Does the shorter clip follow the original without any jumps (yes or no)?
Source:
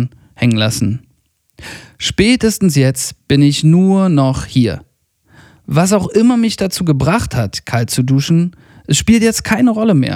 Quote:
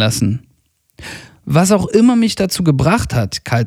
no